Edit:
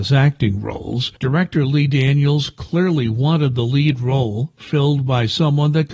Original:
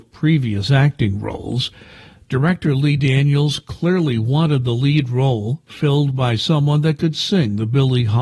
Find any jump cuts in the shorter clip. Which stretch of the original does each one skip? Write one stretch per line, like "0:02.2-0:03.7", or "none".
0:01.8-0:02.3